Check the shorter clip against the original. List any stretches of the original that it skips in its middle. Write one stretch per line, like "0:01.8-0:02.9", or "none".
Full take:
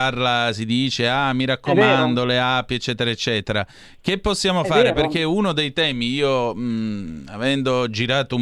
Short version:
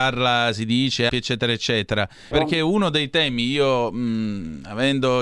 0:01.1-0:02.7
0:03.9-0:04.9